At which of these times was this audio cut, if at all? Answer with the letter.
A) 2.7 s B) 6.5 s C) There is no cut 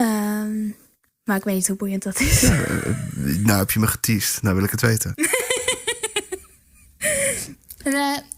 C